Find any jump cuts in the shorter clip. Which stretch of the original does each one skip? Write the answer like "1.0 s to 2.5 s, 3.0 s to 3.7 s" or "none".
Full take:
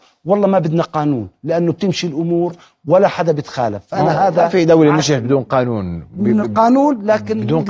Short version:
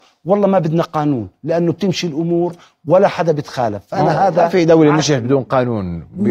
none